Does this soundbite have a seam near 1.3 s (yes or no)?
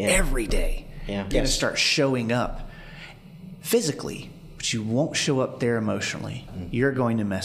yes